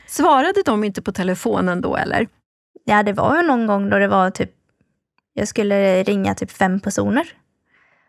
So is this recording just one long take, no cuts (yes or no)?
yes